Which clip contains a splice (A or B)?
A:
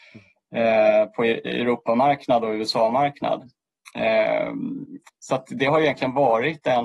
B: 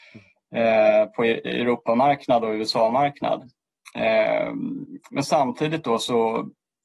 A